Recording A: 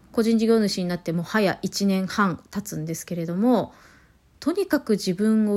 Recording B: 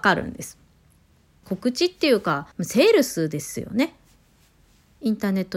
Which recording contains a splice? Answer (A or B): B